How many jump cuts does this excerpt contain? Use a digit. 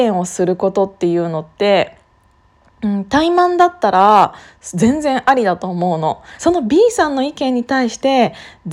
1